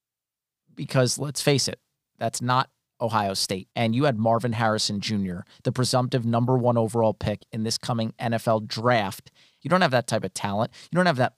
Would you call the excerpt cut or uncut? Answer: cut